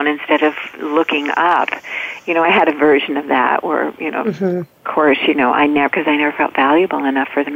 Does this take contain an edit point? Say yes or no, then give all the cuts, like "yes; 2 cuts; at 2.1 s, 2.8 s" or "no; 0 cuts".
no; 0 cuts